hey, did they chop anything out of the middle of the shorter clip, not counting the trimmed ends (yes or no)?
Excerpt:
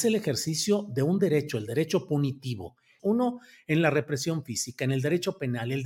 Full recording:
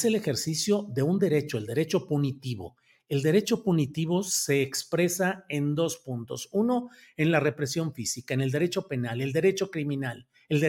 yes